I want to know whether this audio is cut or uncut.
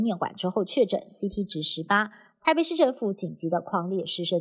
uncut